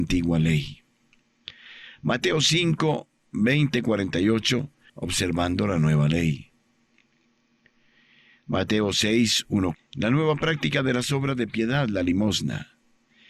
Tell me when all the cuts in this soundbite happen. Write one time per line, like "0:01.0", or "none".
0:04.9
0:09.7